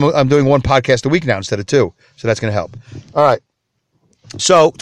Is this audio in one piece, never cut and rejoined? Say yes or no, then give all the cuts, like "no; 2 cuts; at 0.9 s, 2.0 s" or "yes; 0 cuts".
yes; 0 cuts